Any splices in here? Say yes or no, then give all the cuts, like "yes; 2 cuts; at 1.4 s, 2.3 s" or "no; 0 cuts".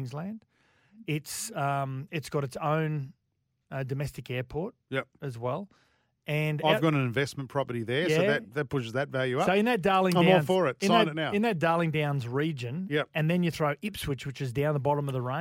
no; 0 cuts